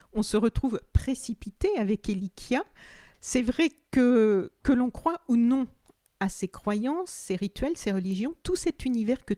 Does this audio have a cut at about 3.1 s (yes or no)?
yes